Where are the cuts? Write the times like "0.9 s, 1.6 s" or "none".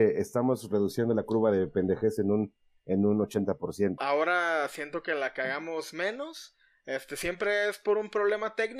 4.0 s